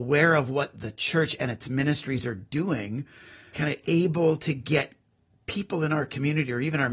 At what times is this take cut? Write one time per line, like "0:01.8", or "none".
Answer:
0:03.5